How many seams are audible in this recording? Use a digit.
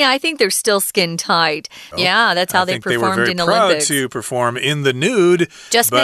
1